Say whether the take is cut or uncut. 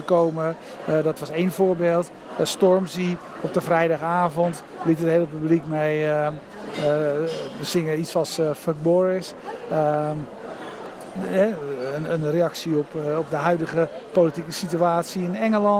uncut